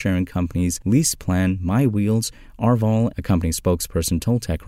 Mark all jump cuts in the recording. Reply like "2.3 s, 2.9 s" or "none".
3.1 s